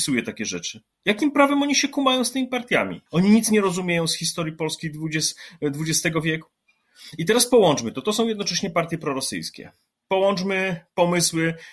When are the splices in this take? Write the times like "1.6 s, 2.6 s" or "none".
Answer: 3.1 s